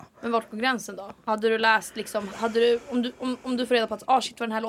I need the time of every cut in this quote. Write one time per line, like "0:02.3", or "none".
0:02.3